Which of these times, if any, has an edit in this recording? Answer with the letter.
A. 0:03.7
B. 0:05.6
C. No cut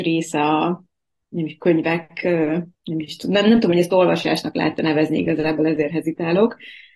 C